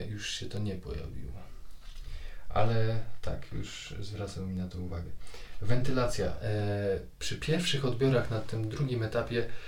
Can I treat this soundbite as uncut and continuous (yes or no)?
yes